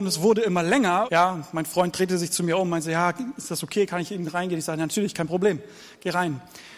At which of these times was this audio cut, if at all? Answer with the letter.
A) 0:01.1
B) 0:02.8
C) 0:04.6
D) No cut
A